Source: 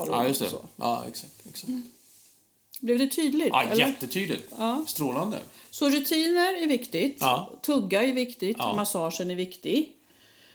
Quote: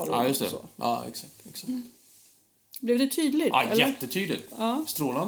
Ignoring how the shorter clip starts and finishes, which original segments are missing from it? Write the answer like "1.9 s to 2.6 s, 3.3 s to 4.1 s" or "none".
none